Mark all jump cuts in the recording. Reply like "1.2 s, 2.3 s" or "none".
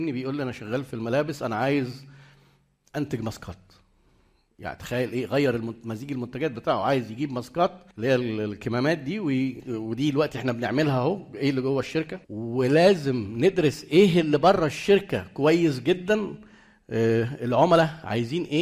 7.9 s, 9.6 s, 12.2 s